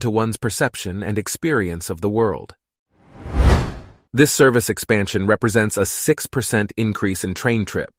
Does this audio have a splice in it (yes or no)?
yes